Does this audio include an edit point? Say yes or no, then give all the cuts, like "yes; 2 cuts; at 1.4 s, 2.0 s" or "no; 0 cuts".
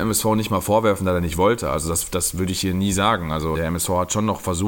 yes; 1 cut; at 3.5 s